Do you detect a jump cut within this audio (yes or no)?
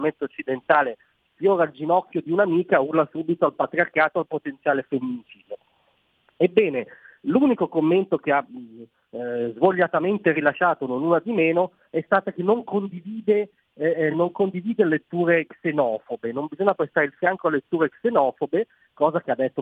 no